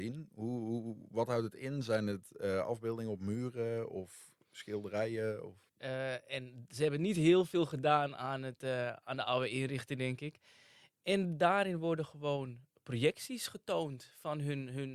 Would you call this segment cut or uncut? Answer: cut